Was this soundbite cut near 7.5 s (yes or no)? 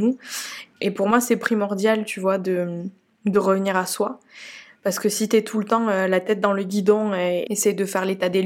yes